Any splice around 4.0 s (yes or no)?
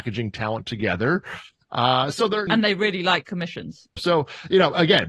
yes